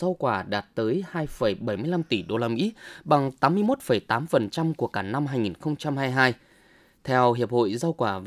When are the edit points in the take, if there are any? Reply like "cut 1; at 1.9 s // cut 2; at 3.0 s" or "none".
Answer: none